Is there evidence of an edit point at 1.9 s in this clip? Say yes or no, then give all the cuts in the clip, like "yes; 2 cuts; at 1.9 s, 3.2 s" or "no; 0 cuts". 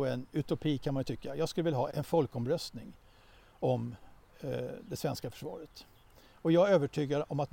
yes; 1 cut; at 1.9 s